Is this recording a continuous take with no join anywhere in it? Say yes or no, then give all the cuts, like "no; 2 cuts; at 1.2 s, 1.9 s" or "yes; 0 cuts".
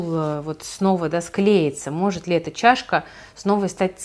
yes; 0 cuts